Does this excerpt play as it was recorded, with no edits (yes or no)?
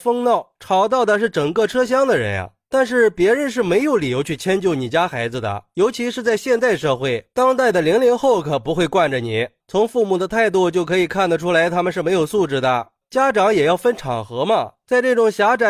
no